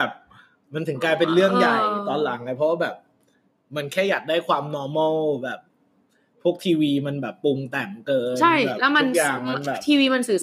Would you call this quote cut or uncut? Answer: uncut